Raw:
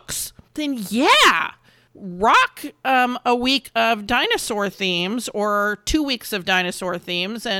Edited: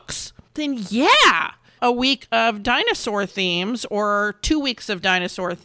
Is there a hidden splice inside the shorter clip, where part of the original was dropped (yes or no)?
yes